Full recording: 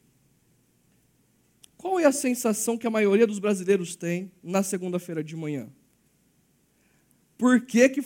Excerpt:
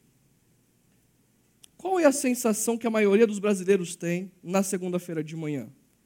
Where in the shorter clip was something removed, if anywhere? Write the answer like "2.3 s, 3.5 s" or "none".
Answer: none